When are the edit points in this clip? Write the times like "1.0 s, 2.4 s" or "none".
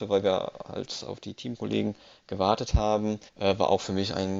3.3 s